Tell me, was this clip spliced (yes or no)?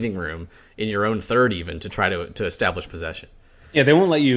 no